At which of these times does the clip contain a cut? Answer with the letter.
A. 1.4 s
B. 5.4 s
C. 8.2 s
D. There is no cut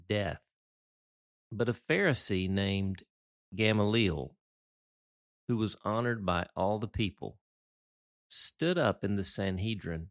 B